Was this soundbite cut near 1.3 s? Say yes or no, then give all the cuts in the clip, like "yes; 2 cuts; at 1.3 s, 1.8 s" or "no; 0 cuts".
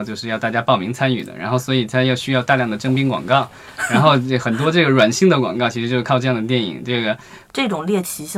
no; 1 cut; at 7.5 s